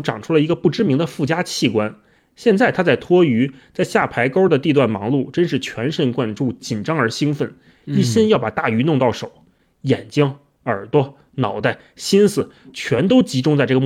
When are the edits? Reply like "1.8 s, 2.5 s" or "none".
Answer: none

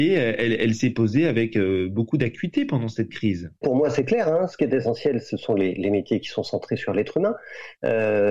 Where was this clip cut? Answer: 3.6 s

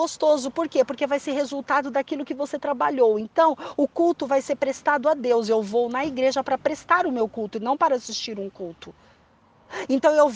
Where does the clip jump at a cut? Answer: none

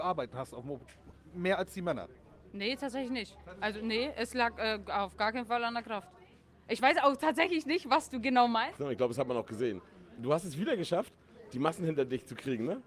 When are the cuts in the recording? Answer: 8.8 s, 10.2 s

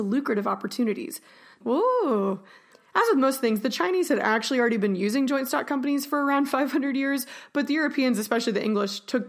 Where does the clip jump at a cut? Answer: 1.6 s

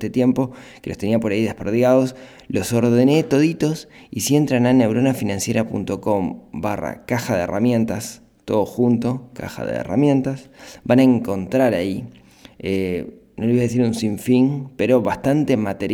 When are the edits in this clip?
none

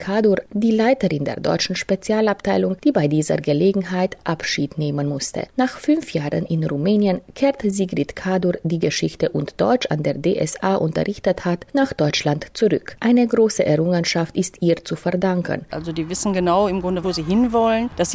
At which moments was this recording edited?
15.7 s, 17.0 s

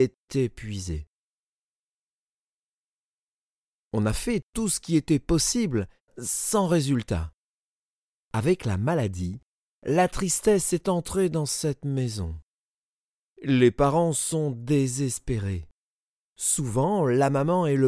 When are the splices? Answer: 6.1 s

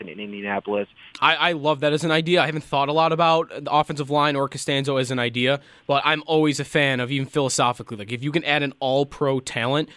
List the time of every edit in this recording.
1.1 s

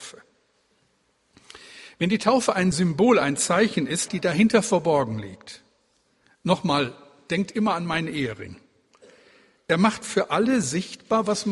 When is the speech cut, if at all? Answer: 4.1 s

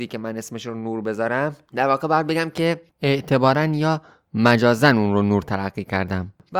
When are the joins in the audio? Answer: 2.9 s

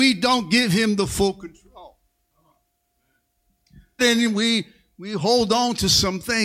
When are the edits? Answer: 4.0 s

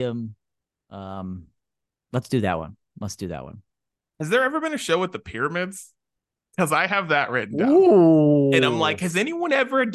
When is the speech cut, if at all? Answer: none

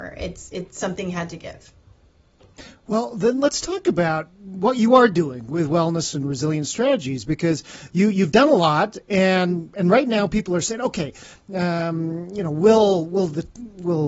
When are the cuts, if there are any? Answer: none

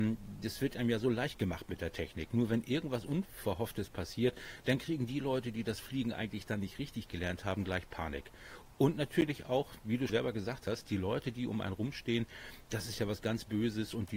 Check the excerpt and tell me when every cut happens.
2.3 s, 10.1 s

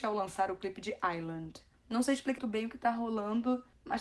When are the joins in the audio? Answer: 2.4 s

